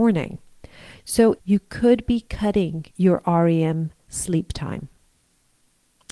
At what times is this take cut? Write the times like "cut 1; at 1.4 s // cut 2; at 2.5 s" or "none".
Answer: cut 1; at 1.4 s // cut 2; at 2.9 s